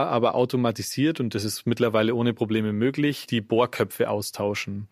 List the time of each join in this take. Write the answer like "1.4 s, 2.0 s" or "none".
none